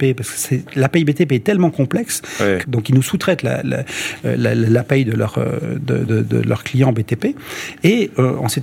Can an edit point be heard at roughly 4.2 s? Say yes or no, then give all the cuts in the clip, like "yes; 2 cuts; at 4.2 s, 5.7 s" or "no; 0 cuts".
no; 2 cuts; at 2.6 s, 6.1 s